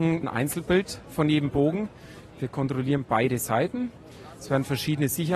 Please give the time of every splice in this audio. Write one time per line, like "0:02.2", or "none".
0:02.3